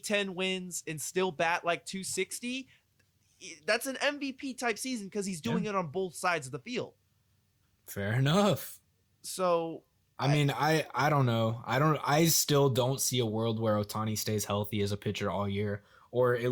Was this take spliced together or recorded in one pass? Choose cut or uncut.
uncut